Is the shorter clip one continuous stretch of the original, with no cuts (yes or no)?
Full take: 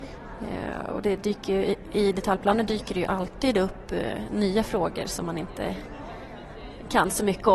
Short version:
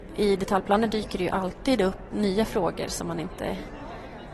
no